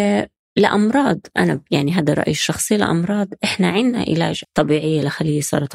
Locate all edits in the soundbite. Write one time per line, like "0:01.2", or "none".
0:04.4